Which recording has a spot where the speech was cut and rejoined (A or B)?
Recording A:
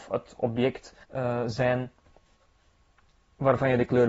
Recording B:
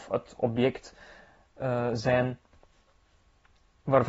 A